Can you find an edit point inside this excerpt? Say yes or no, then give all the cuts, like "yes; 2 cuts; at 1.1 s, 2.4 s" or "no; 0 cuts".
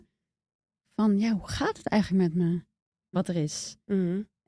yes; 1 cut; at 3.1 s